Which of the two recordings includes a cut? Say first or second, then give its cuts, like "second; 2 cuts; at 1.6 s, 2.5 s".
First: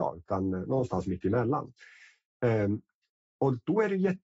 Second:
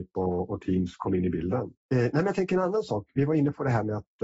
second; 1 cut; at 1.7 s